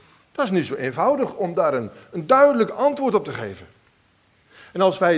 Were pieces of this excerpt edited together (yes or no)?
no